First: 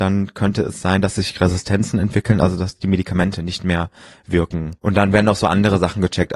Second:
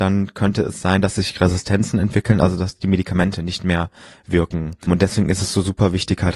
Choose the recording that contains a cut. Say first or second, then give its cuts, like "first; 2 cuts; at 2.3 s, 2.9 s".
first; 1 cut; at 4.8 s